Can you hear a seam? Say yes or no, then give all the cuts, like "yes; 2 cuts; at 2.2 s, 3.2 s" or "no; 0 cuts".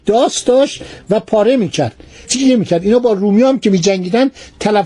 yes; 1 cut; at 2.2 s